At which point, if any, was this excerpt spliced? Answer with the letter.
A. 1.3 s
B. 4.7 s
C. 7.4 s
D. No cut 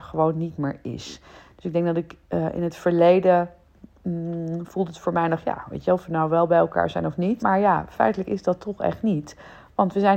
C